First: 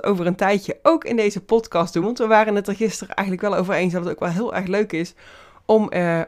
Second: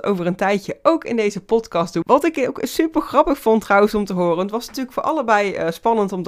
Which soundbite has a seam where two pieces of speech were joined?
second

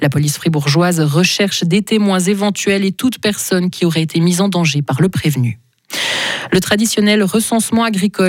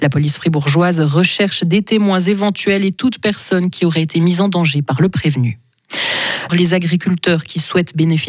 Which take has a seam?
second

